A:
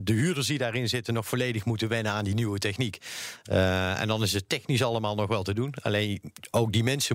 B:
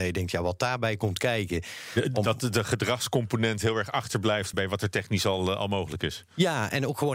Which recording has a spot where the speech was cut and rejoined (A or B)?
B